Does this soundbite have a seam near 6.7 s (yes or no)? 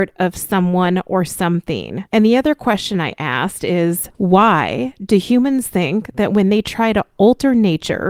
no